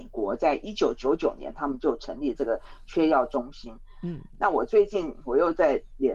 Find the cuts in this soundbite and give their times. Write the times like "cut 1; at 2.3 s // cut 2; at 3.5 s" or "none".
none